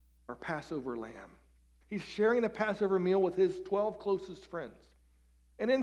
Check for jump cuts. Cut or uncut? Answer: cut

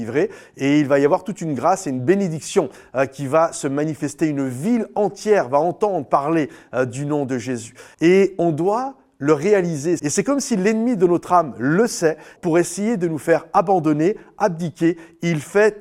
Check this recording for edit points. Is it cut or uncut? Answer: cut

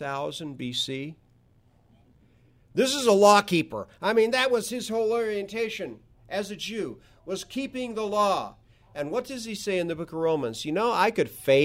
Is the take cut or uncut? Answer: cut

